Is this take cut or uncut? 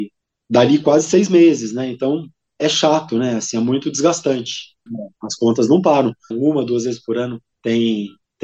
cut